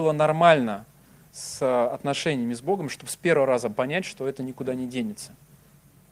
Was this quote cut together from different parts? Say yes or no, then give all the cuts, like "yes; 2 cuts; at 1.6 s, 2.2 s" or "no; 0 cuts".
no; 0 cuts